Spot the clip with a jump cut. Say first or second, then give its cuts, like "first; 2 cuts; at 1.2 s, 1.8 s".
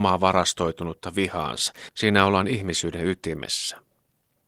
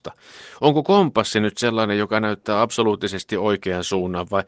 first; 1 cut; at 1.9 s